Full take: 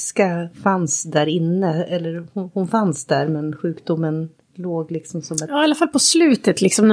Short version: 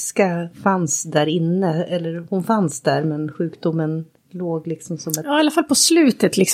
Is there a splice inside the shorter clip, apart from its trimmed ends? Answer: yes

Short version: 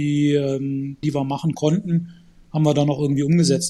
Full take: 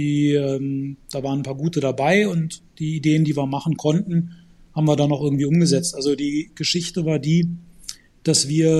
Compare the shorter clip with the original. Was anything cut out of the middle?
yes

